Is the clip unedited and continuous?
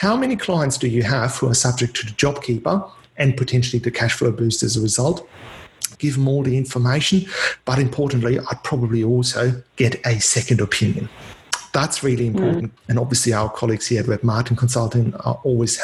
no; 2 cuts; at 5.9 s, 12.8 s

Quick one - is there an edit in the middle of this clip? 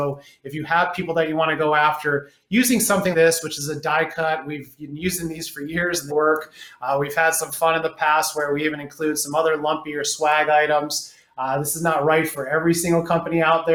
yes; 2 cuts; at 3.1 s, 6.1 s

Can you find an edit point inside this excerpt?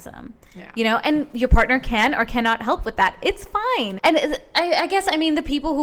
yes; 1 cut; at 4.0 s

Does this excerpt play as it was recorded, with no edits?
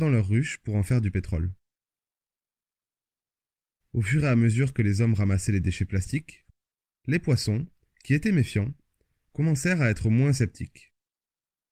yes; 0 cuts

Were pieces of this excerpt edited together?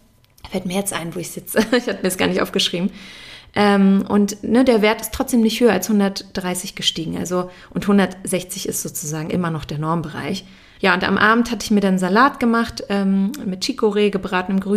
yes; 1 cut; at 10.8 s

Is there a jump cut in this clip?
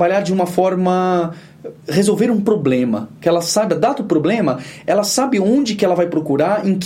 yes; 1 cut; at 1.8 s

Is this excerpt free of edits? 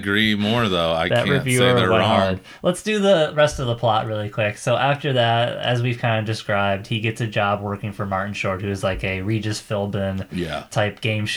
yes; 0 cuts

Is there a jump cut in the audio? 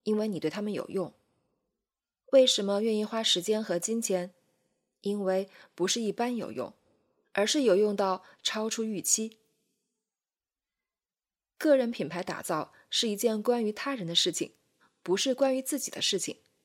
no; 0 cuts

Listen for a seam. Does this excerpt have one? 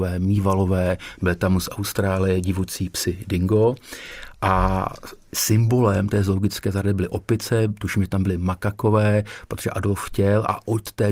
no; 0 cuts

